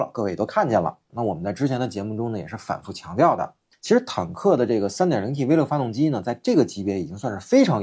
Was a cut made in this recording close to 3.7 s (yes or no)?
no